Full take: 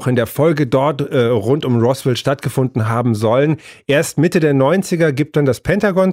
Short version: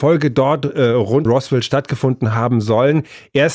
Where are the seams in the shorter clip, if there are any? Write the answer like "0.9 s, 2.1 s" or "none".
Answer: 1.3 s